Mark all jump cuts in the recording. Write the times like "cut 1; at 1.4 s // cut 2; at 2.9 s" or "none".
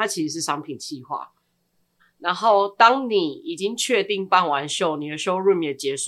cut 1; at 2.0 s